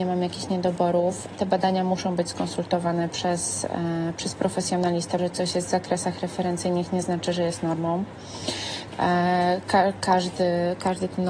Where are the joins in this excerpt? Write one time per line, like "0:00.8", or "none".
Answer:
0:05.2